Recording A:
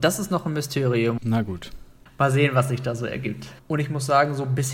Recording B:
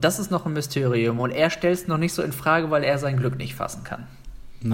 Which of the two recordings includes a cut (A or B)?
A